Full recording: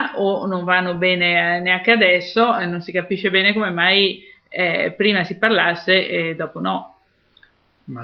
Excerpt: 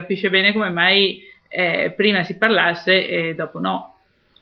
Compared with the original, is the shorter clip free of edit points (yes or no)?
yes